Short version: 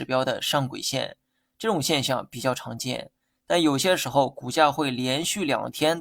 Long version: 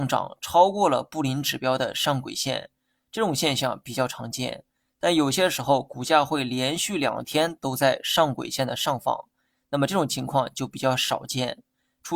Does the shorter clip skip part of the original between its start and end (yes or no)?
no